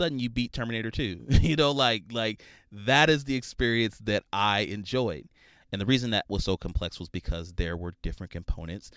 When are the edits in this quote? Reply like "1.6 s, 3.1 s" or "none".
5.6 s